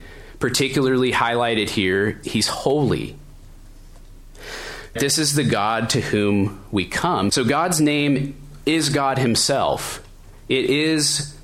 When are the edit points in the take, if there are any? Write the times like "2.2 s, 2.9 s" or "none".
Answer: 2.2 s, 5.0 s, 7.3 s